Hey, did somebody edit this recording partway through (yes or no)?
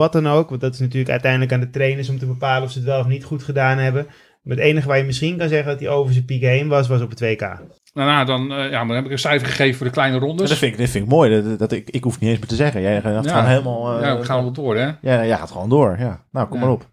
no